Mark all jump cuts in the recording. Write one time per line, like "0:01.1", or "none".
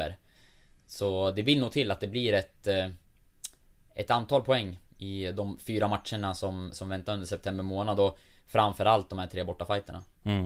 none